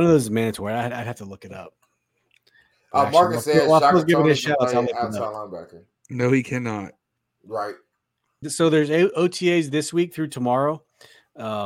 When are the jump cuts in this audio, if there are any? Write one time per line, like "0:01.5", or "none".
0:08.4